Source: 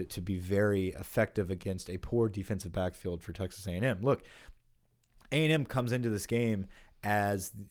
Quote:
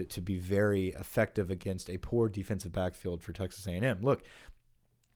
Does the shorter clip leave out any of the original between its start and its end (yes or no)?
no